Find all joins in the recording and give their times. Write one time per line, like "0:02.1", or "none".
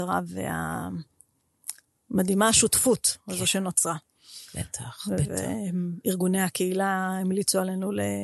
none